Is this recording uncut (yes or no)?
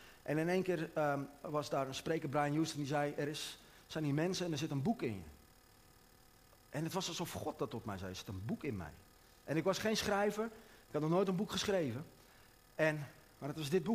yes